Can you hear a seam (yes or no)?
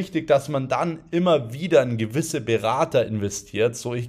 no